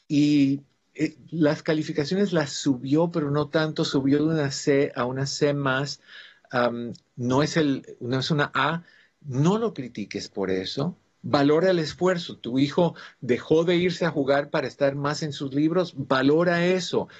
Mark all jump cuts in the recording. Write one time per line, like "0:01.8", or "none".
0:12.4